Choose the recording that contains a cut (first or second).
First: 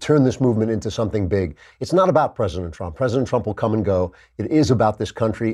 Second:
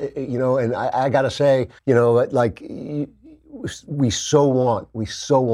second